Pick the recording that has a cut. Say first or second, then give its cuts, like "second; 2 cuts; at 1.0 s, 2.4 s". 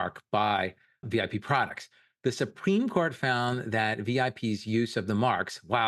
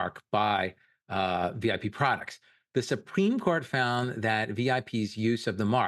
first; 1 cut; at 1.0 s